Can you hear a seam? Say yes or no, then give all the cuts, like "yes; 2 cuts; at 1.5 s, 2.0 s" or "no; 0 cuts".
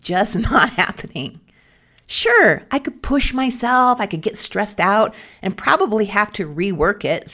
no; 0 cuts